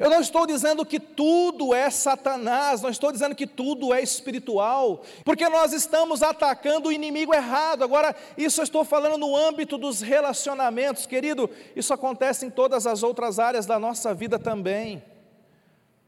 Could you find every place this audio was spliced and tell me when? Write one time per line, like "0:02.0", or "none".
0:05.2